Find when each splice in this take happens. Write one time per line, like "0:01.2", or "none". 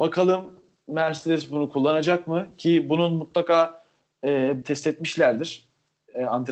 0:04.6